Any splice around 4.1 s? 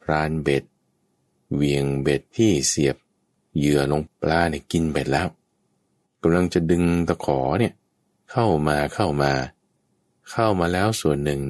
yes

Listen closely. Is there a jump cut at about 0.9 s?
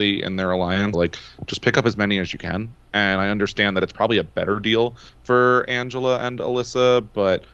yes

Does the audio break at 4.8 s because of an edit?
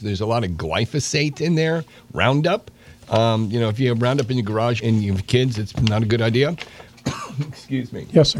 yes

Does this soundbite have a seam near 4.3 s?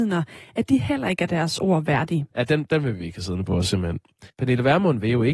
yes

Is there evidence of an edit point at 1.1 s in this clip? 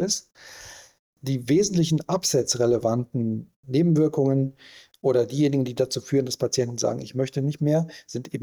yes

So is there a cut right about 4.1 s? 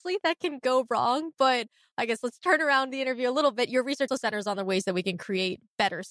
yes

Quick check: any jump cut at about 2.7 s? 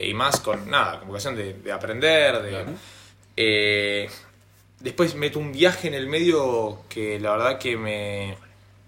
yes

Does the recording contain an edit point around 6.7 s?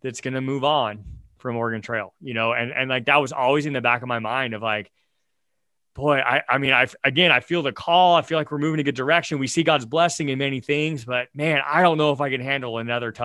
no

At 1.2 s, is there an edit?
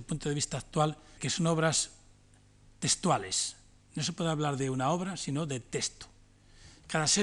yes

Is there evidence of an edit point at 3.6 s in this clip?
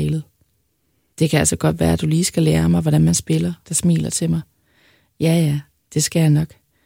yes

